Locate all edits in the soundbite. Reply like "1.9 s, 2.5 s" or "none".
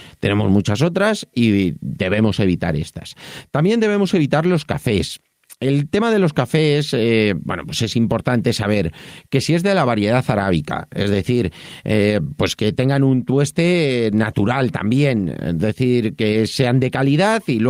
none